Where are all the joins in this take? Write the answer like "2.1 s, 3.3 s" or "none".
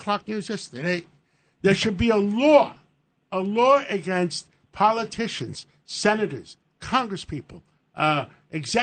4.6 s